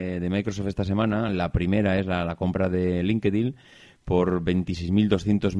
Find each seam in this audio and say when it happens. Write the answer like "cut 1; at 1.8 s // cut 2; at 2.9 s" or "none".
none